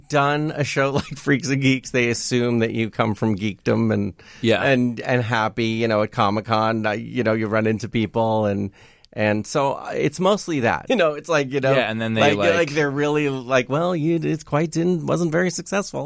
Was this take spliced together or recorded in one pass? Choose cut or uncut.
cut